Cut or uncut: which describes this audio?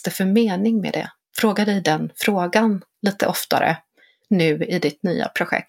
uncut